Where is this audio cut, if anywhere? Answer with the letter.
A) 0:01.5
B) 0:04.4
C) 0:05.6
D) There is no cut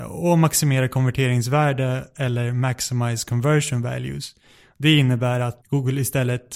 C